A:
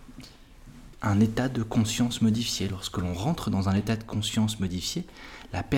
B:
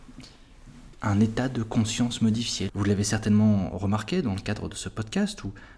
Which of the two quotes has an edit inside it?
B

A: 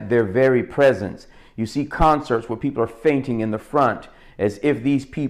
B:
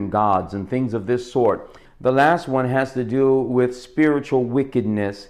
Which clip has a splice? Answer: B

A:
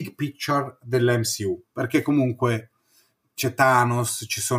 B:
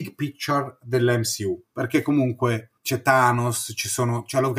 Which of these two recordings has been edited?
B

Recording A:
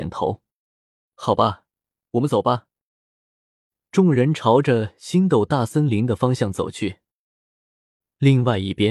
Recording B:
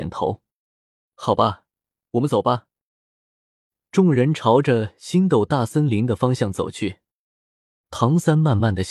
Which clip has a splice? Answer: B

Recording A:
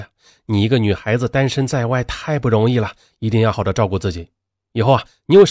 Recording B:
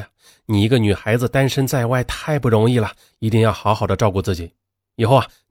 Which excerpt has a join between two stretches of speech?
A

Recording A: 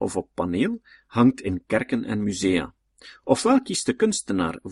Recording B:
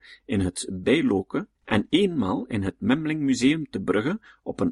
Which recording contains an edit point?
B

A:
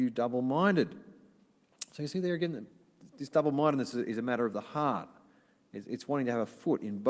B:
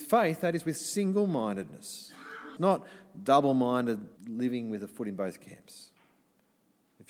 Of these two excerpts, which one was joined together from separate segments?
B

